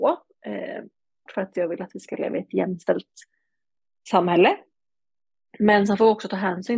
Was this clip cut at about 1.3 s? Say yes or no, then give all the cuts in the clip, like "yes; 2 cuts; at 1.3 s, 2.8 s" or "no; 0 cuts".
yes; 1 cut; at 1.3 s